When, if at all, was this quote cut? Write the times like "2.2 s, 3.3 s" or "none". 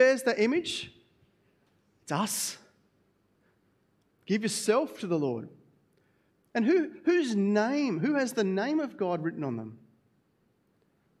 none

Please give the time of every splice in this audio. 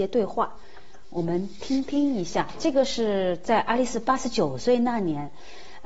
none

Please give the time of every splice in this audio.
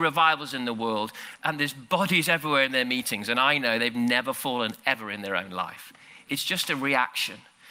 none

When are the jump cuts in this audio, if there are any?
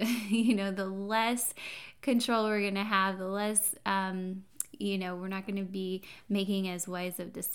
none

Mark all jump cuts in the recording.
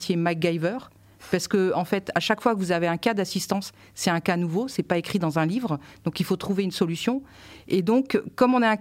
none

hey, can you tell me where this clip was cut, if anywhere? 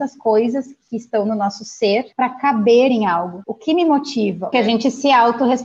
3.4 s, 4.5 s

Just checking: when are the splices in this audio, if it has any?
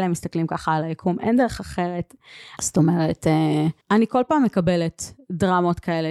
2.6 s, 3.8 s

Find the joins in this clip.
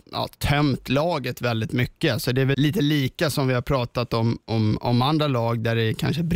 2.5 s

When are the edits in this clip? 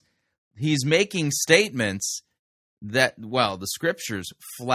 none

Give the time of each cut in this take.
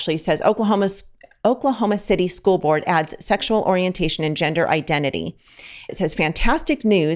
5.9 s

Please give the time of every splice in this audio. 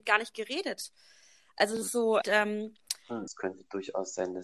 2.2 s, 3.3 s

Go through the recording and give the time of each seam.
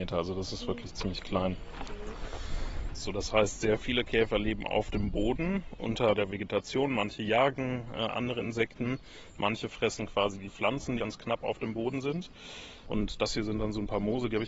11.0 s

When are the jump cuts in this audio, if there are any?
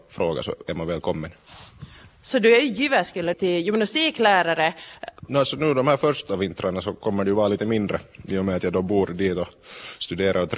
3.3 s, 5.2 s

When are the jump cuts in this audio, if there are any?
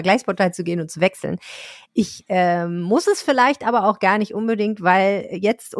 none

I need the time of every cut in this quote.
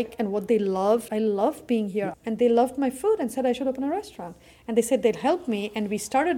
1.1 s, 2.1 s

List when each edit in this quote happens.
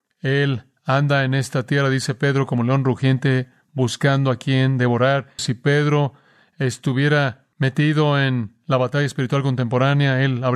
5.4 s, 7.5 s

